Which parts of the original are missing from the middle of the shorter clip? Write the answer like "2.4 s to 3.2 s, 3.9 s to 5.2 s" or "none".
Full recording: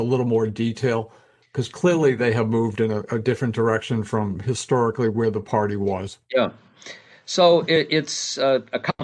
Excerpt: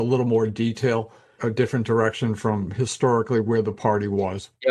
1.4 s to 3.1 s

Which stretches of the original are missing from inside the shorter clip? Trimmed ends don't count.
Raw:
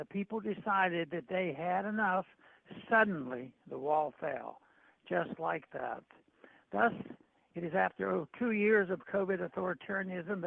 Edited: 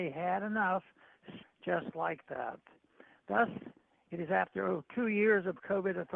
2.9 s to 4.9 s

